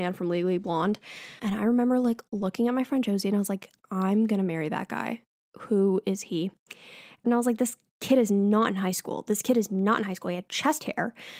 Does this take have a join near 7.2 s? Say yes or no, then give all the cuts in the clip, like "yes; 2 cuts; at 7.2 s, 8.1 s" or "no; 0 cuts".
yes; 2 cuts; at 1.4 s, 7.2 s